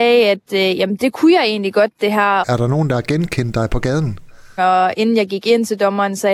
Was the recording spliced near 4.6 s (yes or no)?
yes